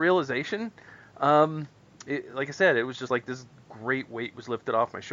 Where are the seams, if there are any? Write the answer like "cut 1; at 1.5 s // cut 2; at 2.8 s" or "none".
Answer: none

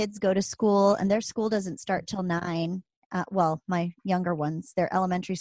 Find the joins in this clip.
none

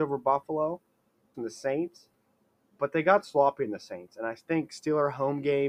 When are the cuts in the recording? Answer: cut 1; at 1.3 s

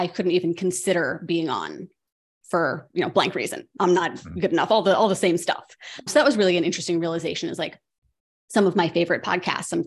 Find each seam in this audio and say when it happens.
cut 1; at 6.1 s

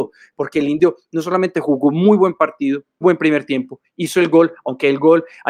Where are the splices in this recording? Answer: cut 1; at 3.0 s

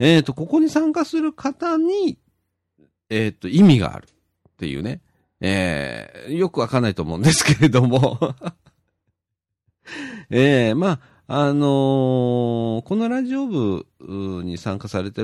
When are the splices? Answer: none

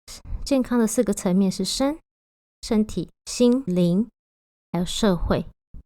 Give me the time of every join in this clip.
cut 1; at 3.7 s

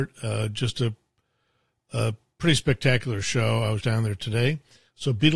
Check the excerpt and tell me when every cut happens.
cut 1; at 3.8 s

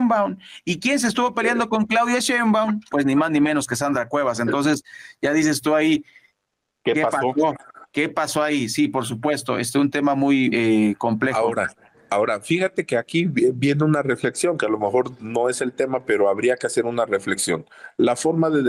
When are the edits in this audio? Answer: cut 1; at 10.5 s

